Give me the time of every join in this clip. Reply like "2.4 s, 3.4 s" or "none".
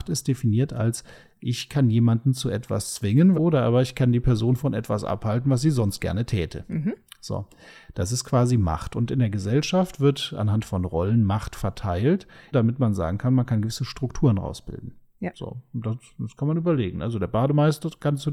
3.3 s, 12.5 s